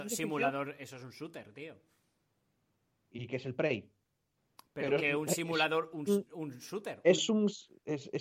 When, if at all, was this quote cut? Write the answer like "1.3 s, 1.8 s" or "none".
4.6 s, 6.1 s